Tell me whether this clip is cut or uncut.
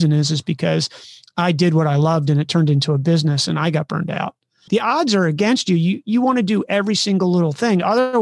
cut